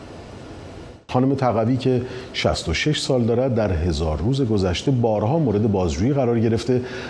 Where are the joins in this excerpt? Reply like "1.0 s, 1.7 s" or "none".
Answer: 1.1 s